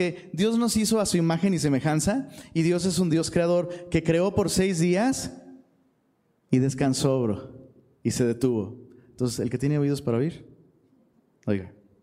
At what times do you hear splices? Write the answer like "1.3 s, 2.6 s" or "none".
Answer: none